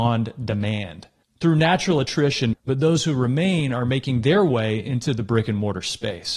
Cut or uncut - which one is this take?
cut